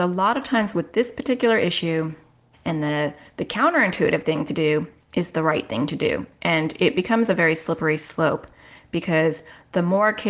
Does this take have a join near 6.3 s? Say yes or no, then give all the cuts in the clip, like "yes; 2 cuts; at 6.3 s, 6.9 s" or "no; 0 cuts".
no; 1 cut; at 2.5 s